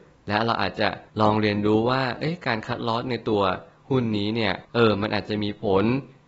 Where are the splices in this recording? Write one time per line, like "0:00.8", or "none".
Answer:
0:01.1
0:04.6